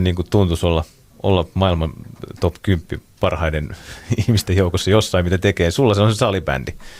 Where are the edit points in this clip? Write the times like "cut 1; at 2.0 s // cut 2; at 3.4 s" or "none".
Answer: none